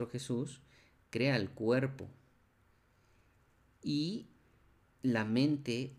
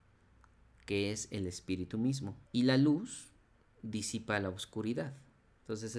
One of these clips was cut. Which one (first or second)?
second